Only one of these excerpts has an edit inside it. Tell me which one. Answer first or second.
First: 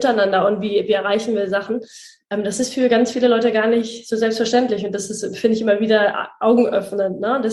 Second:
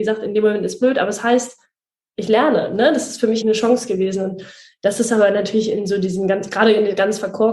second